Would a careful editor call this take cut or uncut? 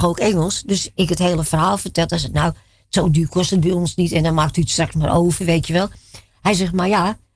uncut